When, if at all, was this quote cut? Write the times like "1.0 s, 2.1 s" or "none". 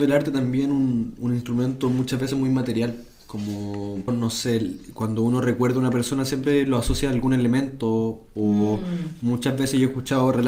4.1 s